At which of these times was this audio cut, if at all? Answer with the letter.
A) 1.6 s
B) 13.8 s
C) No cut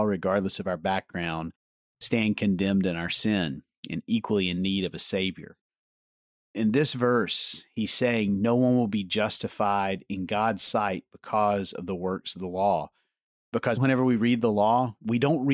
B